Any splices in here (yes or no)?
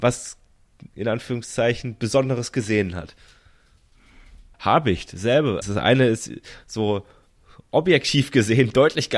yes